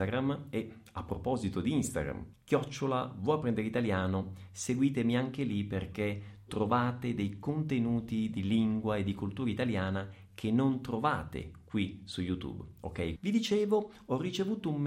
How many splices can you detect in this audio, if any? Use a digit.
2